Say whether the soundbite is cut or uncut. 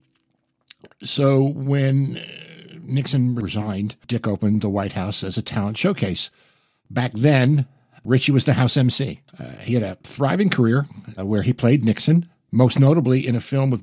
cut